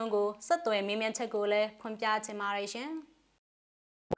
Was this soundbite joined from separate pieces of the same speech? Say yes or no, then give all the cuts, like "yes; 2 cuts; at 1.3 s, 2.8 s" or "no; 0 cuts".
no; 0 cuts